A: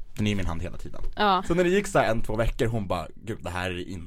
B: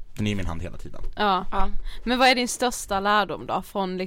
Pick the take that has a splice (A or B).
A